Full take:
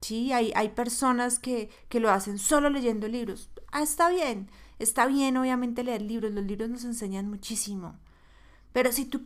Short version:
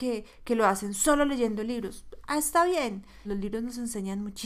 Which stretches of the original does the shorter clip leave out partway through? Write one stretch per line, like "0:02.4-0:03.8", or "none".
0:04.7-0:06.3